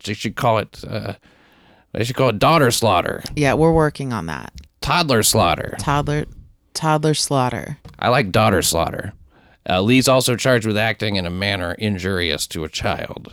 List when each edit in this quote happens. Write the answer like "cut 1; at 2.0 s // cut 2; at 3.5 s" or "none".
none